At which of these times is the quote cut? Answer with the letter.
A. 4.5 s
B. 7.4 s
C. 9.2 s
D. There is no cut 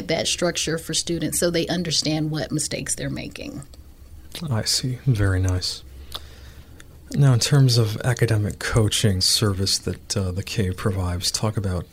C